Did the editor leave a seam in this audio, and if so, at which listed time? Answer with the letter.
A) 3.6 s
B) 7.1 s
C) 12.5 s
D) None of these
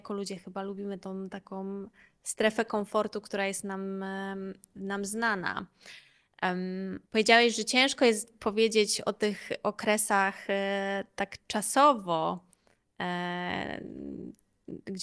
B